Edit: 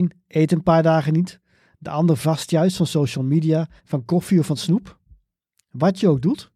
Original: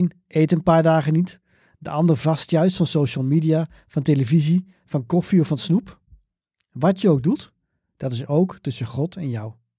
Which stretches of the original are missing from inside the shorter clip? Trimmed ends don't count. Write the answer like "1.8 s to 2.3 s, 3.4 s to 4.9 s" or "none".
3.8 s to 4.8 s